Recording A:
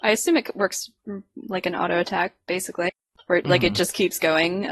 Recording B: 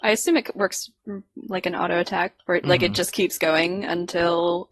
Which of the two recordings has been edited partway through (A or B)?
B